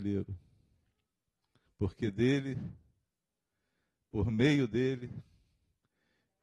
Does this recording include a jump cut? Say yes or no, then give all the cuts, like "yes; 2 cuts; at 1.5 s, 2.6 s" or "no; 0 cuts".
yes; 1 cut; at 1.7 s